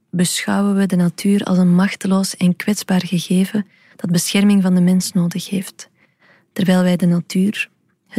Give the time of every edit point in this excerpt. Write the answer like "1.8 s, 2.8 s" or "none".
none